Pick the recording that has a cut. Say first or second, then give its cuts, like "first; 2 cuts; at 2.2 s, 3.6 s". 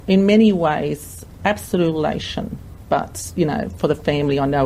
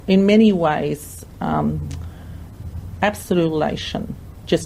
first; 2 cuts; at 1.4 s, 2.8 s